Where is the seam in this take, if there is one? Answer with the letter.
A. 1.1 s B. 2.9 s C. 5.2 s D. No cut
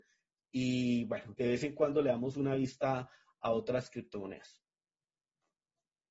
D